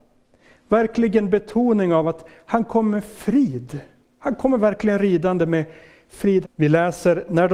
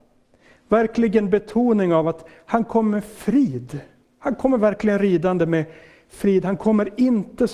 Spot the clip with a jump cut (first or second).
first